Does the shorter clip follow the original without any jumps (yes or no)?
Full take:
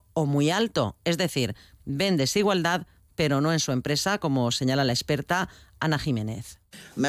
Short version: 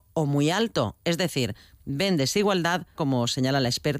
no